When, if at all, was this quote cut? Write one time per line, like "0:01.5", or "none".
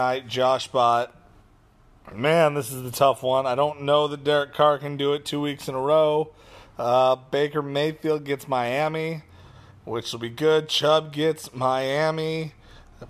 none